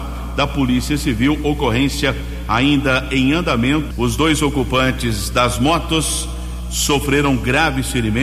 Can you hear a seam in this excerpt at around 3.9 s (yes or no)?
yes